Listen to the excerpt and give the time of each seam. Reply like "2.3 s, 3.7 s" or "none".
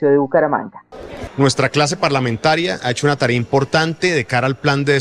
1.3 s